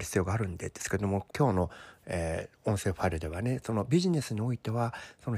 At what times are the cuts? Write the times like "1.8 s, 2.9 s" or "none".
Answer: 1.3 s